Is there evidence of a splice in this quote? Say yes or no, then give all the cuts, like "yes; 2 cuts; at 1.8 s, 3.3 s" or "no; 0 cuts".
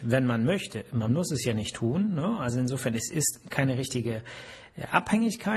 no; 0 cuts